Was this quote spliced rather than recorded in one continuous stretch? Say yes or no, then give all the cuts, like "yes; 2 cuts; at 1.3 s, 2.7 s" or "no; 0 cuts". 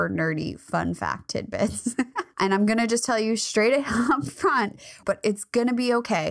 yes; 2 cuts; at 2.3 s, 5.0 s